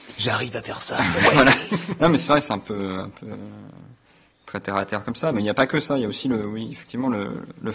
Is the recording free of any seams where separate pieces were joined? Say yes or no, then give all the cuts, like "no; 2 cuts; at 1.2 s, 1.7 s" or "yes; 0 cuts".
yes; 0 cuts